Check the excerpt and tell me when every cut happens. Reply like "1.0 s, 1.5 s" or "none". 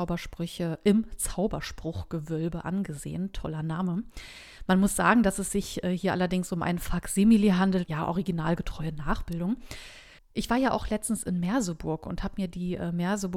7.9 s, 10.2 s